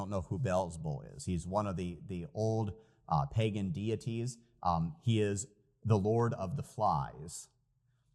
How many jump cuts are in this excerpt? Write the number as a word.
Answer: zero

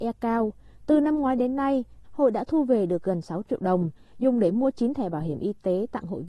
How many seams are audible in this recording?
one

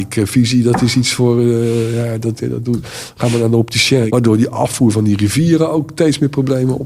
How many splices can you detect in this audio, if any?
two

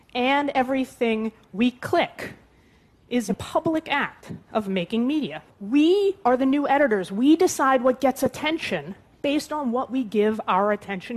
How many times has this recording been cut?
one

